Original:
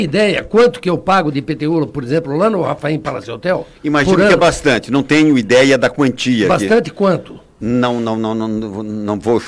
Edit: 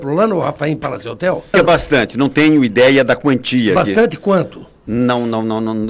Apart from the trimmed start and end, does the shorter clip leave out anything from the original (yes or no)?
yes